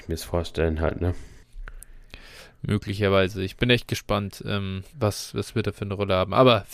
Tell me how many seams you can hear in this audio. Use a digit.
1